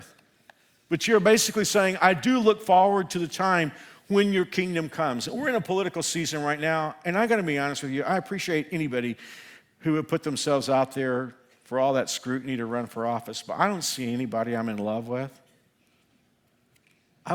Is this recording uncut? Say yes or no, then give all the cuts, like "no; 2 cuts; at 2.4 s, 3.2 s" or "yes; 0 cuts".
yes; 0 cuts